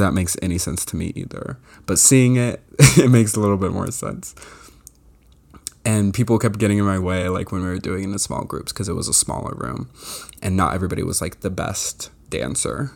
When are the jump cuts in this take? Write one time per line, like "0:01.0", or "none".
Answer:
none